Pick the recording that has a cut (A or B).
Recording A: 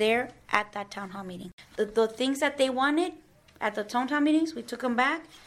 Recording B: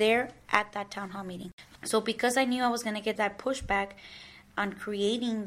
B